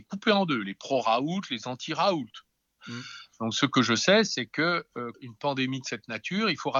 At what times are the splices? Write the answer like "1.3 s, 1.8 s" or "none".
2.8 s, 5.1 s